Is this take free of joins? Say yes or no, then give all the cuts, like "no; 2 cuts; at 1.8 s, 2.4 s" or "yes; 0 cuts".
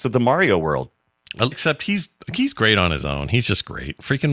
no; 1 cut; at 1.5 s